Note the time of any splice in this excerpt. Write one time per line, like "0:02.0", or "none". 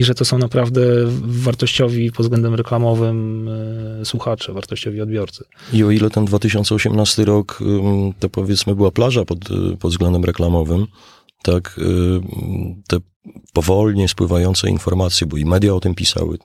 none